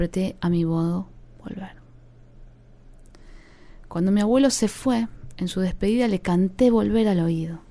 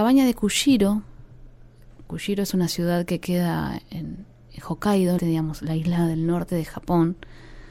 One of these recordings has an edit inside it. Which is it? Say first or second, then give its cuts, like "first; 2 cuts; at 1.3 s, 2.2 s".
second; 1 cut; at 5.2 s